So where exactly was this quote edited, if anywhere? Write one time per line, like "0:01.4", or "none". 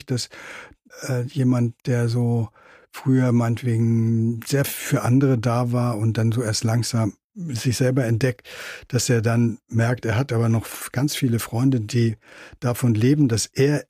0:07.2